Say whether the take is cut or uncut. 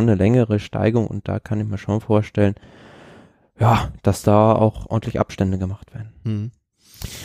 uncut